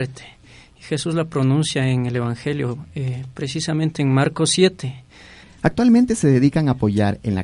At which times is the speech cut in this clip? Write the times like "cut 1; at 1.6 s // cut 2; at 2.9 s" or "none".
cut 1; at 5.4 s